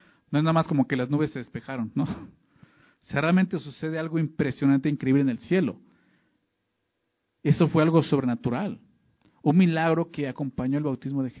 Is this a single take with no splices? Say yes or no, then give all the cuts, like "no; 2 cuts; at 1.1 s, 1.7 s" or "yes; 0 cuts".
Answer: yes; 0 cuts